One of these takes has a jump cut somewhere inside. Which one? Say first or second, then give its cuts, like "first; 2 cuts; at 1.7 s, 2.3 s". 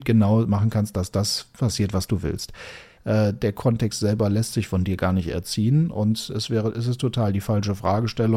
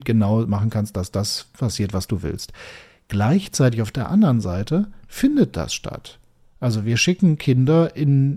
first; 1 cut; at 3.0 s